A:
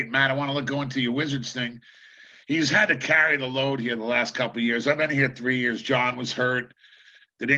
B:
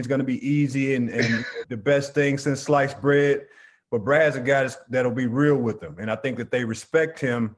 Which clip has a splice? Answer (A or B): B